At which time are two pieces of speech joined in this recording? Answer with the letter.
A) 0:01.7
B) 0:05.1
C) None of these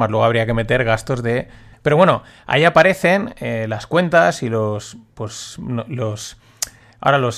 A